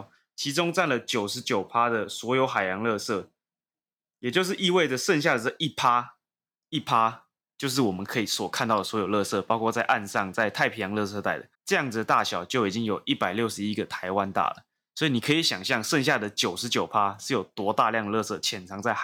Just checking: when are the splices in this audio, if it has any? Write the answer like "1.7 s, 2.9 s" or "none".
11.5 s